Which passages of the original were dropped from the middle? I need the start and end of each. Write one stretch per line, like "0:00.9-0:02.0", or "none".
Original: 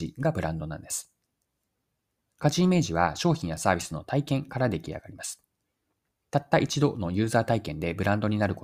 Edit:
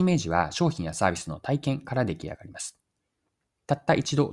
none